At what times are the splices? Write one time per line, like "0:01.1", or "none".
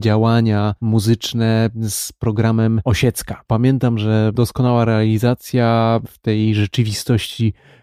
none

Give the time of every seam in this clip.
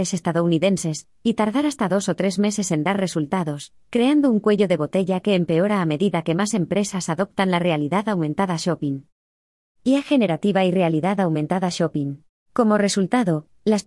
0:12.4

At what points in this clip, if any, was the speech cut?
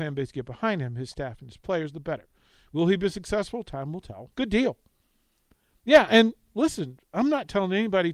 0:04.3

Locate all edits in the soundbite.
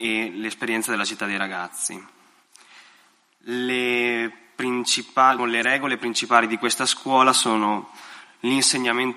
0:05.4

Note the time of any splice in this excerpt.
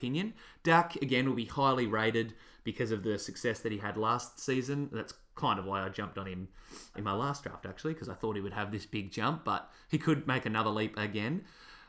0:06.9

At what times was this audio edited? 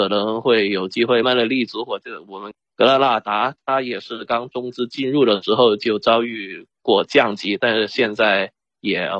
0:01.2
0:04.3

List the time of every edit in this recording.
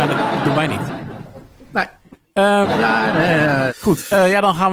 0:02.6
0:03.7

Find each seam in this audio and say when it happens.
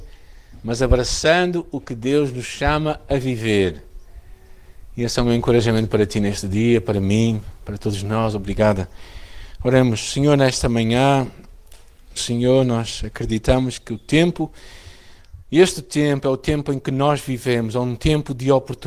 0:12.2

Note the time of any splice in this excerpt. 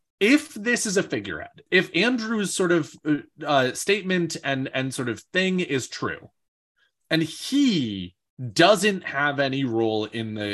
0:01.7

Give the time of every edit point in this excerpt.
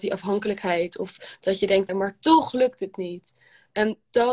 0:01.9

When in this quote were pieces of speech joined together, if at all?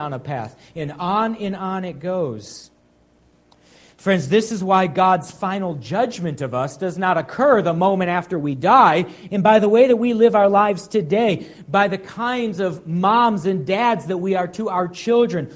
0:09.3

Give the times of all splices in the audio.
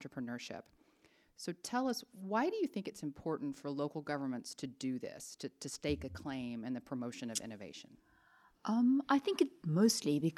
none

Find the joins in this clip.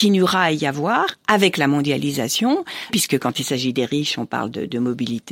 0:02.9

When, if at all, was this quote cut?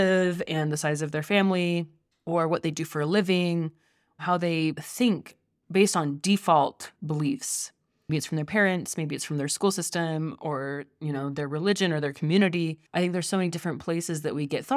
0:08.1
0:12.9

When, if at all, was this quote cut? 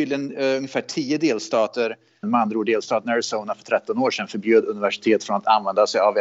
0:02.2

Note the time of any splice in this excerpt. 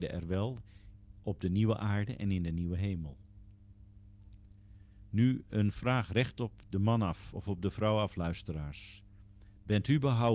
0:05.1

